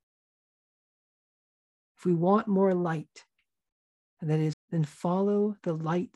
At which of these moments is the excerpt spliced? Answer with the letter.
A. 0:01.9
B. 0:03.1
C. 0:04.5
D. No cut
C